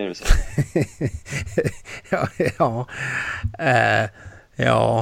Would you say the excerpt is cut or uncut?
uncut